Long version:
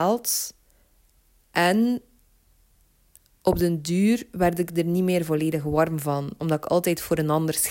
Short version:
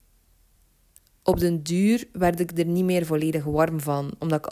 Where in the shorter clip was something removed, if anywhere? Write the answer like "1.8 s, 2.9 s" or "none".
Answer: none